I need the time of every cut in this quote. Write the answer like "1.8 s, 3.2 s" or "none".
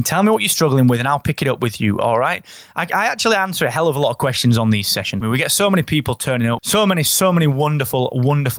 5.2 s, 6.6 s